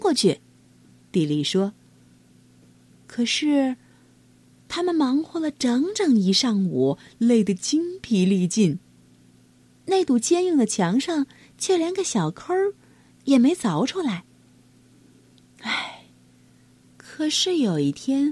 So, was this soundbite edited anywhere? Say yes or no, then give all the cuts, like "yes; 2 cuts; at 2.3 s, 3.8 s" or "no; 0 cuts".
yes; 1 cut; at 16.8 s